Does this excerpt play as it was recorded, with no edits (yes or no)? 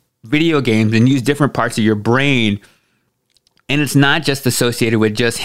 yes